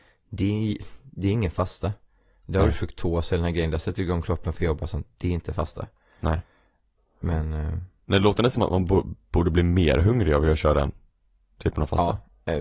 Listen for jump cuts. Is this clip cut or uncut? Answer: uncut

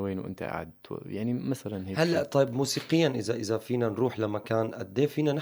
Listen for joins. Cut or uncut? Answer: uncut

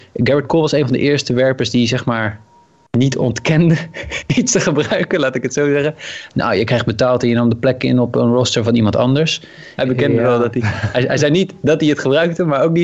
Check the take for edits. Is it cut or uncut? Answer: cut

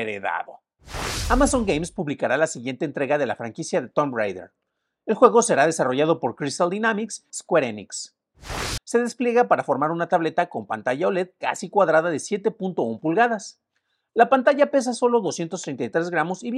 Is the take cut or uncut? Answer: cut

